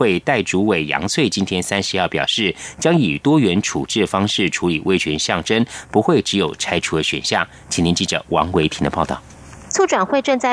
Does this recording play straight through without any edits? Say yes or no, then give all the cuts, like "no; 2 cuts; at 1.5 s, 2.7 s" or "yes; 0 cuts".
yes; 0 cuts